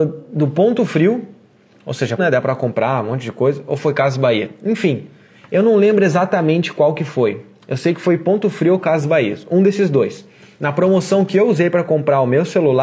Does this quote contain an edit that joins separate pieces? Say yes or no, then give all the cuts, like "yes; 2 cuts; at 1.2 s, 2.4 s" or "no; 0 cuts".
yes; 1 cut; at 2.2 s